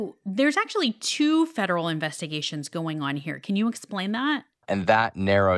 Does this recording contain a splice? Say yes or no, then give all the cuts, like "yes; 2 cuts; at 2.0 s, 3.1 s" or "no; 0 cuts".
yes; 1 cut; at 4.6 s